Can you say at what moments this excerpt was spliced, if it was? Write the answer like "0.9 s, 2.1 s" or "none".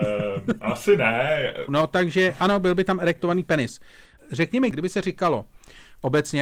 1.7 s

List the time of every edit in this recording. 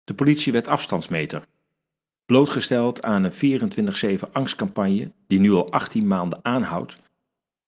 2.2 s

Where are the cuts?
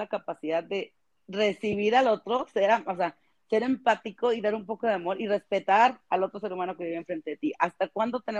none

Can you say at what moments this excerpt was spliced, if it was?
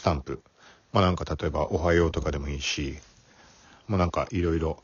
none

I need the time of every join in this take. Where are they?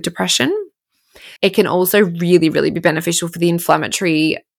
1.4 s

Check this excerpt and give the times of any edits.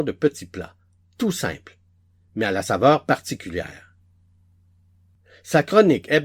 none

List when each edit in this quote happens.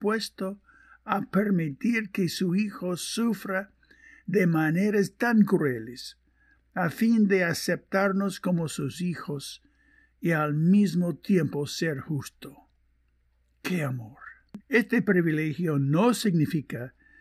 14.6 s

